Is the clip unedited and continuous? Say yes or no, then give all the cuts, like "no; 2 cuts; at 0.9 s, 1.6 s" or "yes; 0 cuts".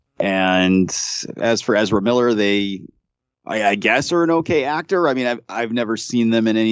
yes; 0 cuts